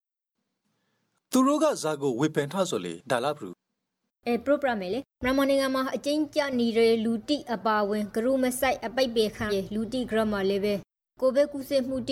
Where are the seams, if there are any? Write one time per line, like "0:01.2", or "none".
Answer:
0:09.5